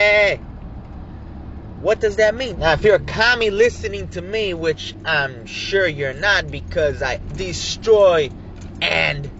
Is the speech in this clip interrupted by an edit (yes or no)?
yes